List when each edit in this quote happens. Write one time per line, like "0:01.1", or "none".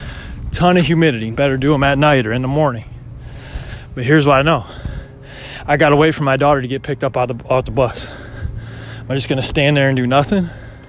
0:01.3